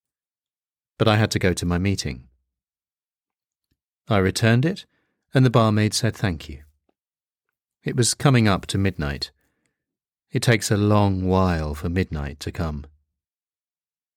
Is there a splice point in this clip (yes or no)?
yes